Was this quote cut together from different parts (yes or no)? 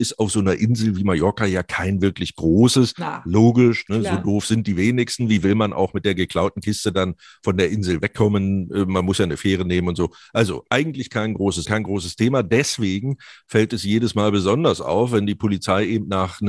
yes